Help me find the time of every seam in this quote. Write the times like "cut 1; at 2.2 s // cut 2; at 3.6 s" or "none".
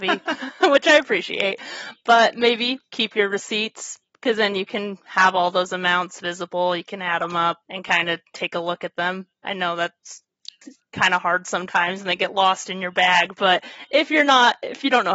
cut 1; at 7.6 s